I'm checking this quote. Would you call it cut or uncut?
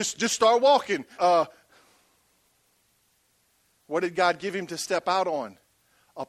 cut